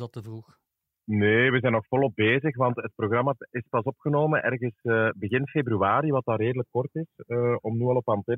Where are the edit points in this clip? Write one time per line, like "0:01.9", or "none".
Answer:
none